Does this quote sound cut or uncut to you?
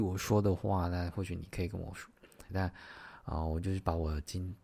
cut